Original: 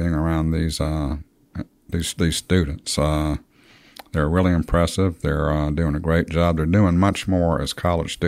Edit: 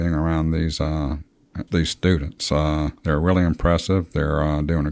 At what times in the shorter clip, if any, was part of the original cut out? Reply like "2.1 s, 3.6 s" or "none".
1.7 s, 3.0 s